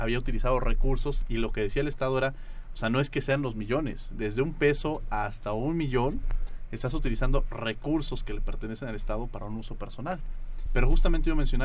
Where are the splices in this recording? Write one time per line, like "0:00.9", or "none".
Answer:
0:10.7